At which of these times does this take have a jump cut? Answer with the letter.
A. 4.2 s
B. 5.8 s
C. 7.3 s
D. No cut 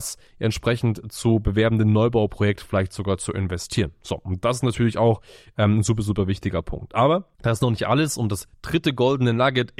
C